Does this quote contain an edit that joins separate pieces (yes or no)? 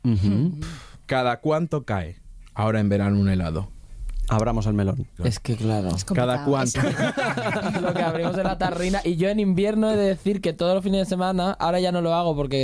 yes